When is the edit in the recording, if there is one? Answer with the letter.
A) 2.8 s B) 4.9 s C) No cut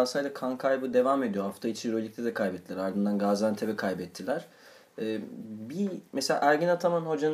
C